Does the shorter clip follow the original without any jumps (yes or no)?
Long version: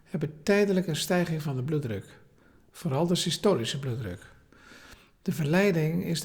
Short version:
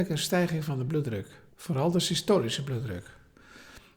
no